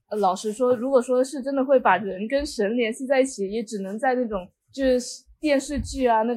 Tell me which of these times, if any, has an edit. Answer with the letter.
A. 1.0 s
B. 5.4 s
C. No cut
C